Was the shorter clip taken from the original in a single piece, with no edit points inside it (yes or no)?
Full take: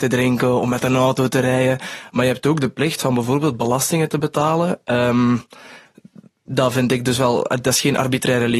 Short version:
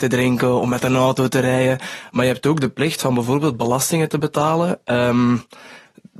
yes